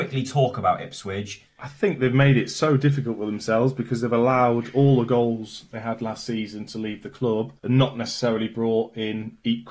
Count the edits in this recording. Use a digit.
2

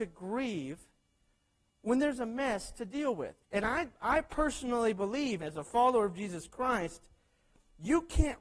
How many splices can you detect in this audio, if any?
2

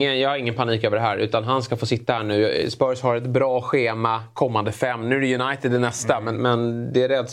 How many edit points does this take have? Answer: 0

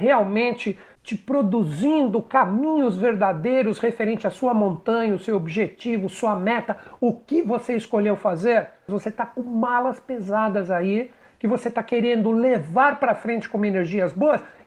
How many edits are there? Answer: 1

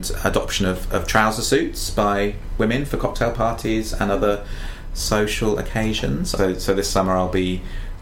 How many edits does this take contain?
1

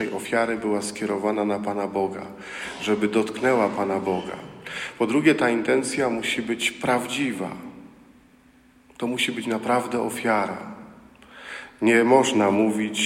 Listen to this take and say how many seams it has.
0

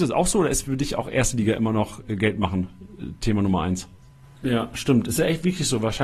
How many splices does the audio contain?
1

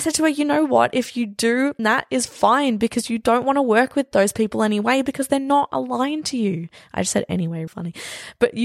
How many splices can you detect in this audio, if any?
2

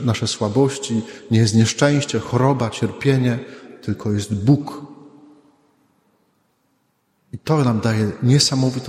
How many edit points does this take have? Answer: 0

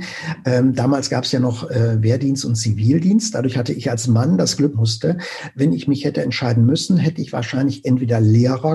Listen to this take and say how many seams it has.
1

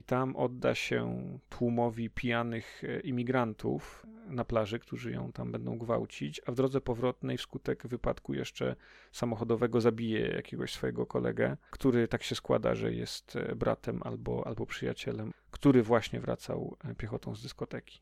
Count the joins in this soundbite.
2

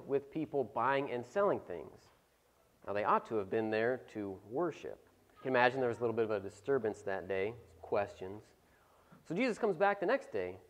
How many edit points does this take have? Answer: 1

